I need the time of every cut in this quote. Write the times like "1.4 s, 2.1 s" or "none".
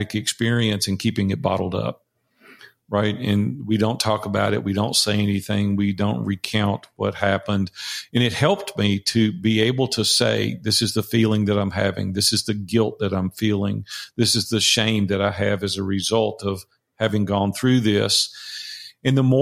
none